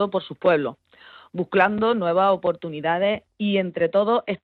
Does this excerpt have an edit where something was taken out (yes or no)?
no